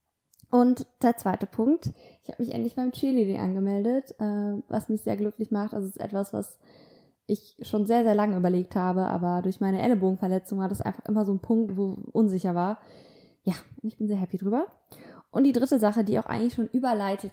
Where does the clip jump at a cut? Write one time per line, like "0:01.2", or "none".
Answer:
0:11.7